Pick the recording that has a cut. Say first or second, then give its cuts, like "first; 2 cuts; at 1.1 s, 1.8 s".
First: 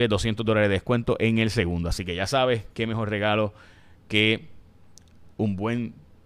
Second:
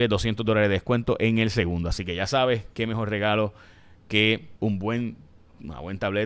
second; 1 cut; at 4.6 s